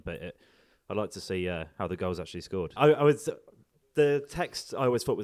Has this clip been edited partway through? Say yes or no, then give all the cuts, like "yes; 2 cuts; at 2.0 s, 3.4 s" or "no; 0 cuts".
yes; 1 cut; at 2.8 s